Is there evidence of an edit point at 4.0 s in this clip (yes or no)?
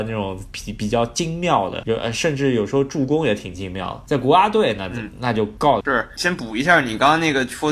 no